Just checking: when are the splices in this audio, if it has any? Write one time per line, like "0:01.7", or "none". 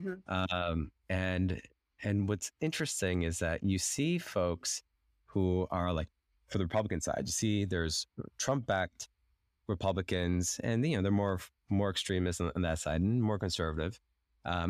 0:09.6